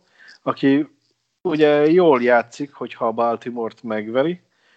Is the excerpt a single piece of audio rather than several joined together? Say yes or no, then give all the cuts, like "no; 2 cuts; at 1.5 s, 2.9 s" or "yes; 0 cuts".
yes; 0 cuts